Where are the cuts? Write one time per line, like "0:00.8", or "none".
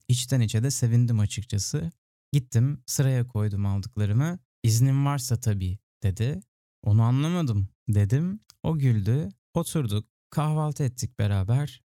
0:04.5
0:06.8
0:09.4